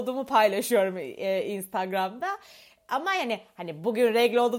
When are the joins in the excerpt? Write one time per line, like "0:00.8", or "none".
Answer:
none